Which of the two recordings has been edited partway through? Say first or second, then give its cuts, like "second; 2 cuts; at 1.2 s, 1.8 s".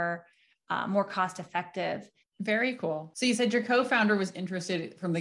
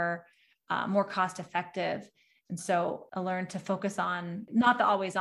first; 1 cut; at 2.2 s